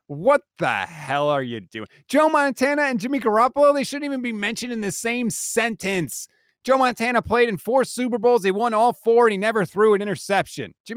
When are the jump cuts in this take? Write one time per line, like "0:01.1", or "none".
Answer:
none

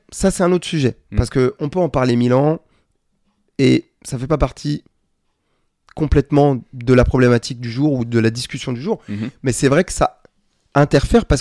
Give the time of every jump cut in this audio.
none

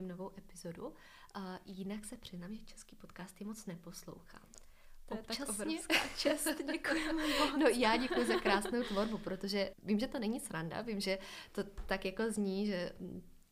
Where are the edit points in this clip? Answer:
0:09.7

